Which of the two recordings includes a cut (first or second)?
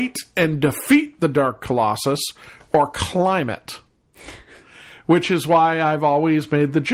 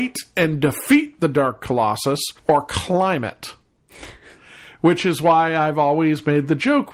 second